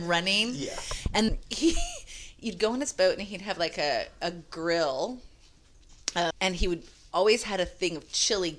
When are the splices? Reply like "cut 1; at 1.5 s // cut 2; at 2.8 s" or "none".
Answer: cut 1; at 1.3 s // cut 2; at 6.3 s